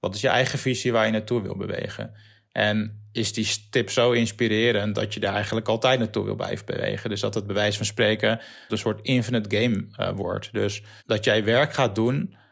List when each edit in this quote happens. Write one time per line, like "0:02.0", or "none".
0:08.7
0:11.0